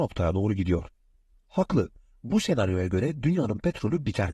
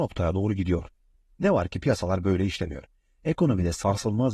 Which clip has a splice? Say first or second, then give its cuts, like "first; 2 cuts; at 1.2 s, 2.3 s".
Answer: second; 1 cut; at 1.3 s